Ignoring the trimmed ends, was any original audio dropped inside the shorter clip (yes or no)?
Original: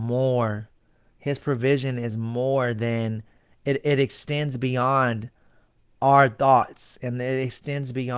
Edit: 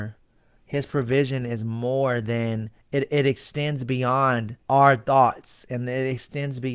yes